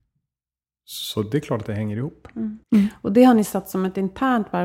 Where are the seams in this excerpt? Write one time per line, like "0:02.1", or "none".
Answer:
0:02.6